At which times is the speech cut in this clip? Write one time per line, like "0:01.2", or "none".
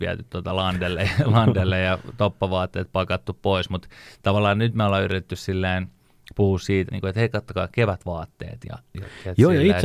0:06.9